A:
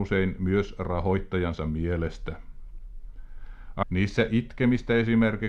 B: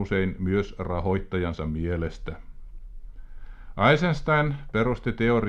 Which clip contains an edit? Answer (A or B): A